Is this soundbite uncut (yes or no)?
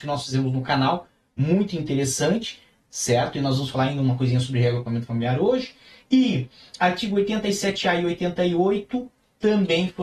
yes